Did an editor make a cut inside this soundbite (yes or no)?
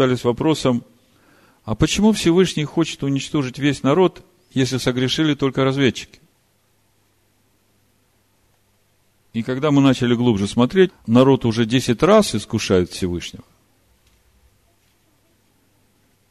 yes